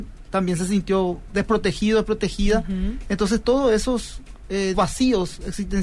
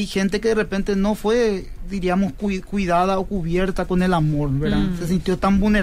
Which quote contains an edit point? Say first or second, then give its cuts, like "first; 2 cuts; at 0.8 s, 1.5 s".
first; 1 cut; at 4.7 s